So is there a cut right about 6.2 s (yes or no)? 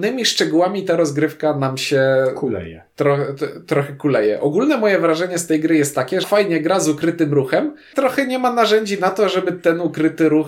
yes